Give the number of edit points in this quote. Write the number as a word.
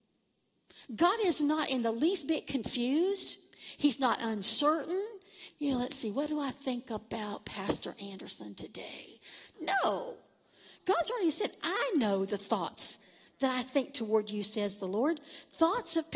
two